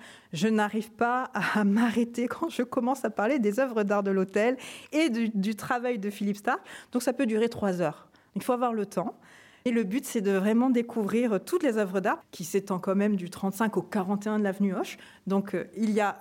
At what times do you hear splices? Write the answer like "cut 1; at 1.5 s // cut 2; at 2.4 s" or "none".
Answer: cut 1; at 12.2 s